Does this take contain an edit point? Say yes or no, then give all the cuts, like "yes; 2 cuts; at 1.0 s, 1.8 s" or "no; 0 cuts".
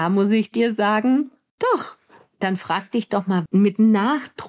yes; 1 cut; at 3.5 s